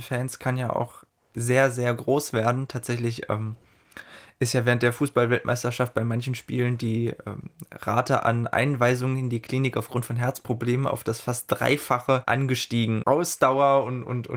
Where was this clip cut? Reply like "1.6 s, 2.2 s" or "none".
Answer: 13.0 s